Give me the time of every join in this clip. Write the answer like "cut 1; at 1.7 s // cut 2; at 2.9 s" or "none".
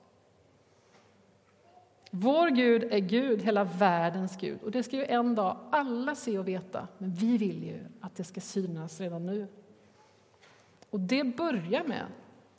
none